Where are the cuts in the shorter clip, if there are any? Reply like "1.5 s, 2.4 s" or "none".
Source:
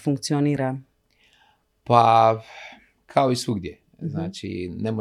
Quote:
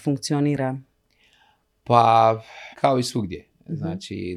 2.7 s